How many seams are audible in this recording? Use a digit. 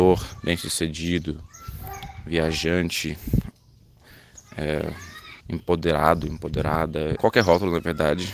2